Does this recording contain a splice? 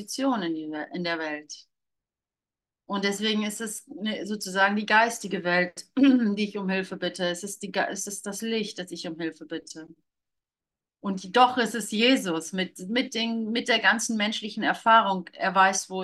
no; 0 cuts

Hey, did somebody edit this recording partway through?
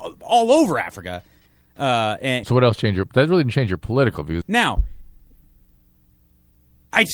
yes; 2 cuts; at 2.4 s, 4.4 s

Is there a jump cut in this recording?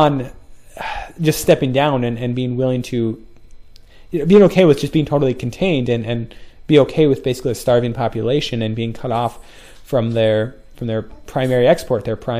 no; 0 cuts

